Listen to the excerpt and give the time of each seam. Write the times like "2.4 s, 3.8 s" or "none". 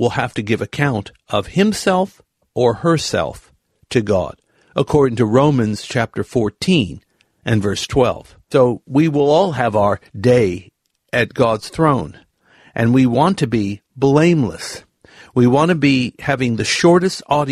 none